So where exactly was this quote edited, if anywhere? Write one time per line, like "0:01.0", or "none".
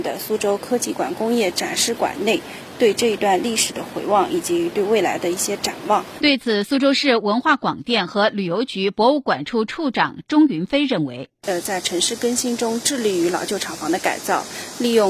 0:06.2